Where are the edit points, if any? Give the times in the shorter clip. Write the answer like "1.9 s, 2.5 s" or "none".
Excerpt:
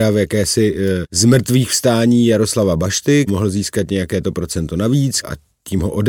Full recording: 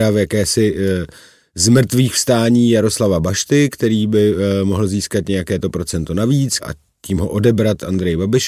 1.0 s, 3.3 s